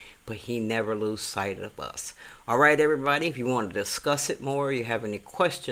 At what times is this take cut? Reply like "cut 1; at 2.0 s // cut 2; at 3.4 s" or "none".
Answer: none